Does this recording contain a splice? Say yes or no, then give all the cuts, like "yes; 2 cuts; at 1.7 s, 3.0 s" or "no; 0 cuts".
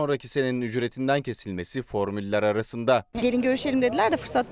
yes; 1 cut; at 3.1 s